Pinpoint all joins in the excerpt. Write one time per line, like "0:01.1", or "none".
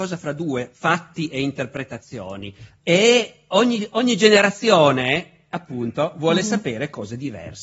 0:02.8